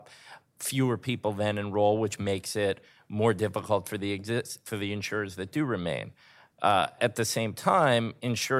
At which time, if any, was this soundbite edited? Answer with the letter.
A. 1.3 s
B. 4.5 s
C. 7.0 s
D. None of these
C